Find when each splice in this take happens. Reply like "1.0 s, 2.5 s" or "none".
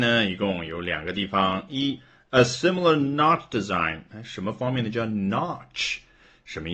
4.1 s